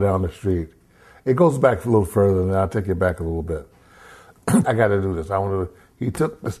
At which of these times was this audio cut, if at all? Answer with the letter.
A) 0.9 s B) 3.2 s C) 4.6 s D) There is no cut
C